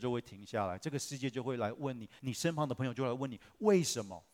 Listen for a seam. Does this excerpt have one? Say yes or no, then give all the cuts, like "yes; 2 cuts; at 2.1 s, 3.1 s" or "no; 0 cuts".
yes; 1 cut; at 2.2 s